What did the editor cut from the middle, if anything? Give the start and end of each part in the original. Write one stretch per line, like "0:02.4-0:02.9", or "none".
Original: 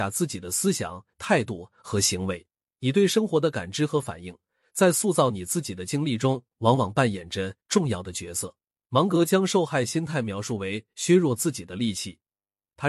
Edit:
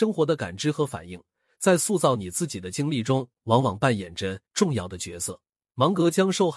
none